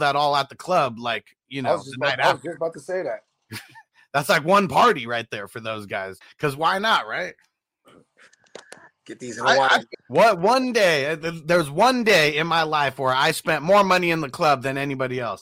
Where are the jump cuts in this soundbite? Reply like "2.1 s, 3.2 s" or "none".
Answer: 6.2 s, 9.9 s